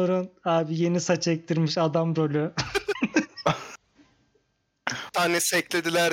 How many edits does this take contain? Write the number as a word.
one